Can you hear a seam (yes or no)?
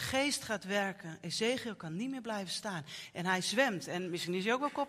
no